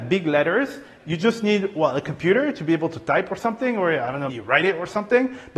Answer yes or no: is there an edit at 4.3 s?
yes